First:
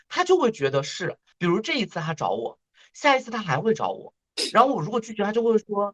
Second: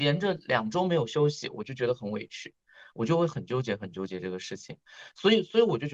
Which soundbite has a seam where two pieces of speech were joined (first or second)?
first